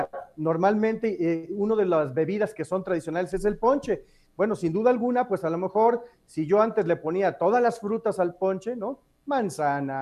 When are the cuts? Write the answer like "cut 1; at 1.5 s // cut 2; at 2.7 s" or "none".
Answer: none